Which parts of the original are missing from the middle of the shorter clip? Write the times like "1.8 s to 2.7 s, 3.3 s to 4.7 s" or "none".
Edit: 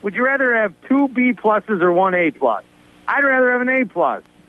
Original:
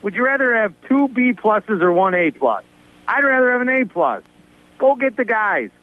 none